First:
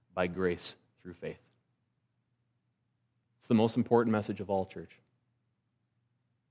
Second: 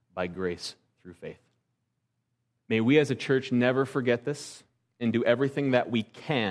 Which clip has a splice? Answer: second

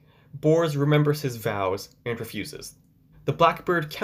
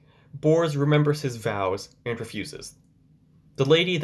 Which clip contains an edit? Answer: first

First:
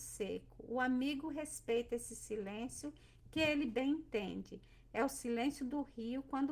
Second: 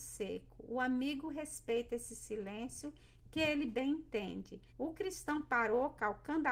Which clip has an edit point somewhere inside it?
second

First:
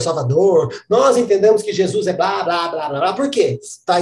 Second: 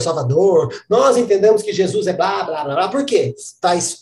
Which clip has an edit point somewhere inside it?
second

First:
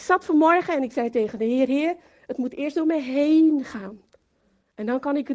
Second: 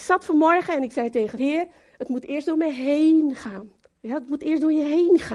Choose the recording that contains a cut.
second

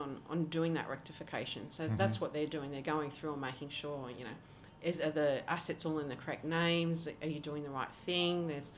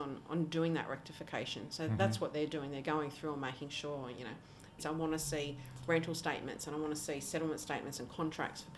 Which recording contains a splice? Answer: second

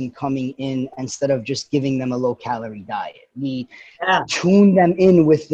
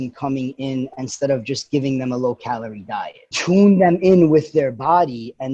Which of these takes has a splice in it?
second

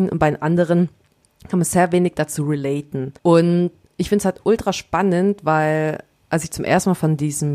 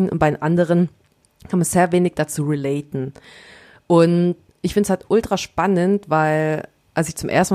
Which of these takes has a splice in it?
first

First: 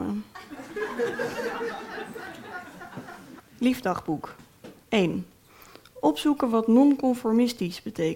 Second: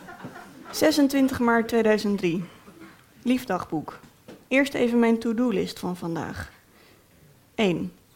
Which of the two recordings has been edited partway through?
first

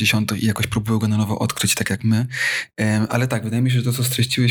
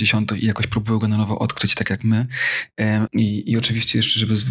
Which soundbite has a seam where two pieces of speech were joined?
second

